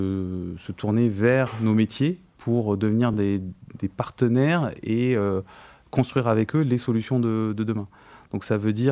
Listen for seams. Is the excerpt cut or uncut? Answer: uncut